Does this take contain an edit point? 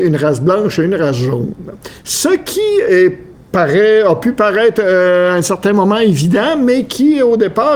no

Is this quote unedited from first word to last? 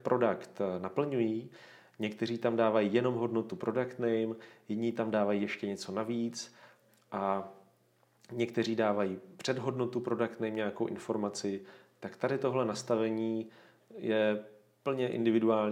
yes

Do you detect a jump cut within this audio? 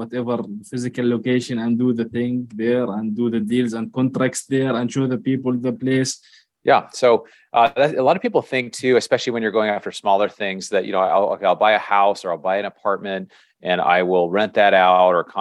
yes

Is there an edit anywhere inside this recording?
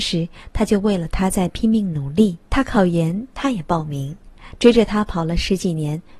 yes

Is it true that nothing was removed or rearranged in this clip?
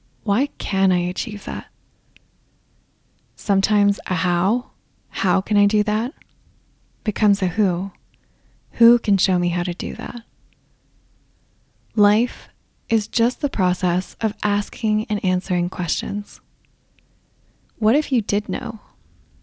yes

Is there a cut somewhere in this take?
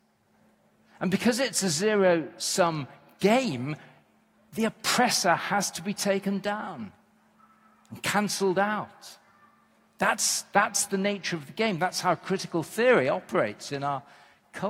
no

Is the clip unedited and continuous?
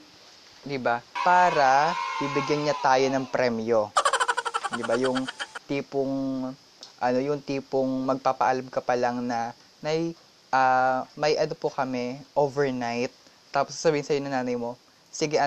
no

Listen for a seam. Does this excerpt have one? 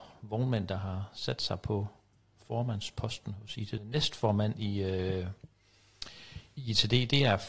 yes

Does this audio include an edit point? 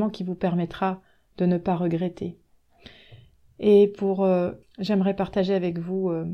yes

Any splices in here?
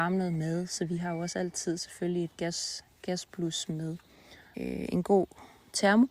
yes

